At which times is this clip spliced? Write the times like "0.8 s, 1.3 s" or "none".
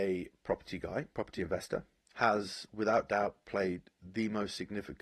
2.0 s